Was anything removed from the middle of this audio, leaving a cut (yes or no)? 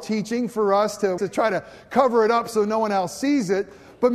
yes